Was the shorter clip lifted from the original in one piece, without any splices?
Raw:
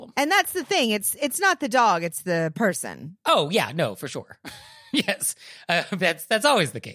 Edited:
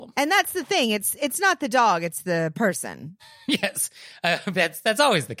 no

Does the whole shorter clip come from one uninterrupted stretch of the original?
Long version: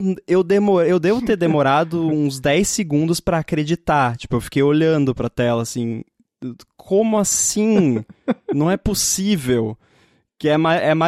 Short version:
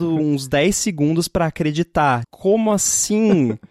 no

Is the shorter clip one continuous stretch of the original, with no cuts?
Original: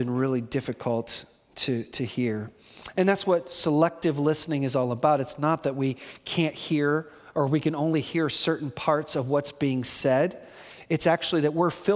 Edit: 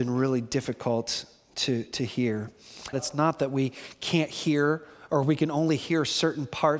no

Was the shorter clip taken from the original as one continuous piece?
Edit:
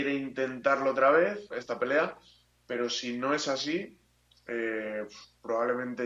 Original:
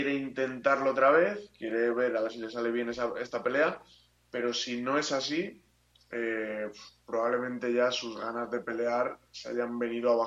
no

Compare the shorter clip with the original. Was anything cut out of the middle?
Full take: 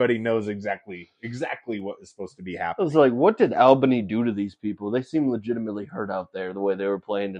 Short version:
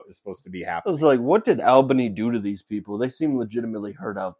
no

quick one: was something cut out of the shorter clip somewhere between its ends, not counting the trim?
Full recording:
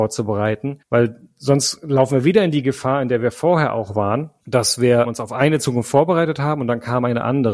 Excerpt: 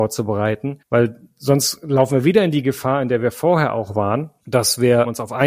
no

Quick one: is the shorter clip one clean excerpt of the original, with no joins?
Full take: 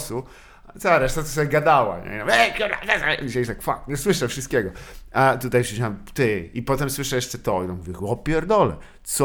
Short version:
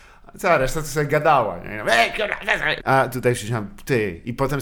no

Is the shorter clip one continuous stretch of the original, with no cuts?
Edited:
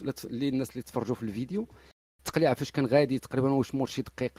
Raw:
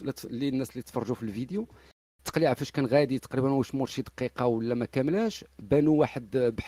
yes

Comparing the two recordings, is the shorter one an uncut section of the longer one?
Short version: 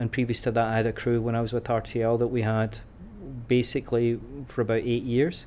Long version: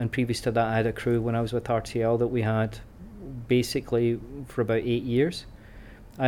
yes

